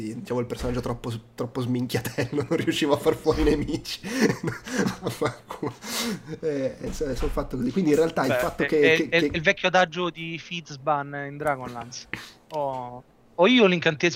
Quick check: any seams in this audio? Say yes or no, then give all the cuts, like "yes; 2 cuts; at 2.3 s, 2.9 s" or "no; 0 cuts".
no; 0 cuts